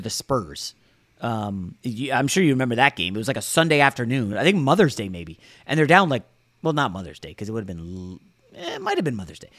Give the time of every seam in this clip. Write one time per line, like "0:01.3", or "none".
none